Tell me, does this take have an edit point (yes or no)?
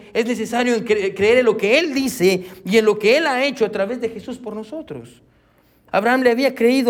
yes